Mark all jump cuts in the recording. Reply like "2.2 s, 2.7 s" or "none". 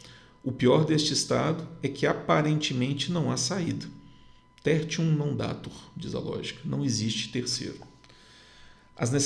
none

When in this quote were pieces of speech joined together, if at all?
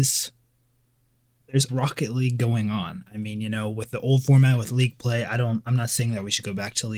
1.7 s

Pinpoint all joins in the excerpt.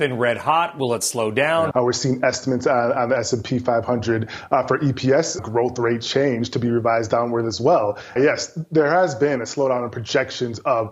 1.7 s, 5.4 s, 8.2 s

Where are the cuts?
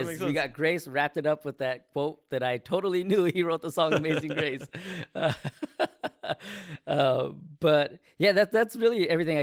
none

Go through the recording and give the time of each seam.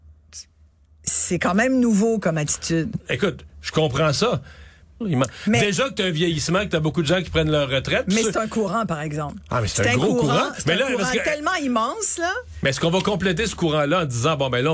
3.0 s, 5.0 s

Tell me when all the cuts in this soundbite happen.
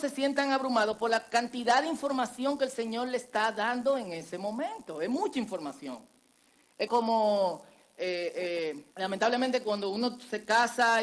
6.9 s, 8.9 s

